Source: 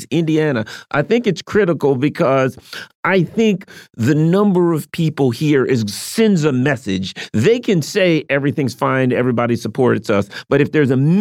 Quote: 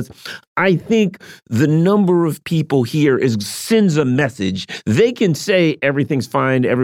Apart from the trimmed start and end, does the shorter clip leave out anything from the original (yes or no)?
no